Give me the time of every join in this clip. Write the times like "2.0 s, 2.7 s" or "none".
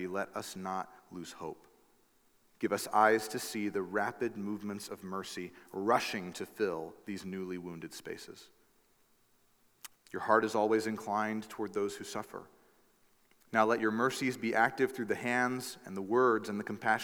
9.9 s